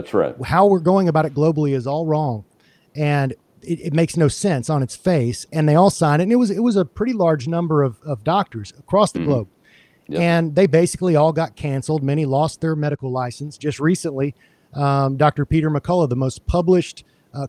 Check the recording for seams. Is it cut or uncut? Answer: uncut